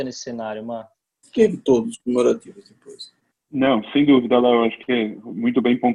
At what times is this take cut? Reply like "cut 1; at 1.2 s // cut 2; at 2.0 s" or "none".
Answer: cut 1; at 1.2 s // cut 2; at 3.3 s